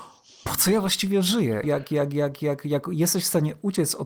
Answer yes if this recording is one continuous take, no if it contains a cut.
no